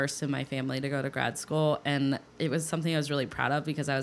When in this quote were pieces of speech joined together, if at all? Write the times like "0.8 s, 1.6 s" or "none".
2.3 s